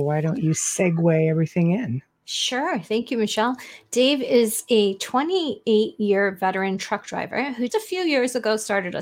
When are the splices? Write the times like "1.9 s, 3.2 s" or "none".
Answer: 7.7 s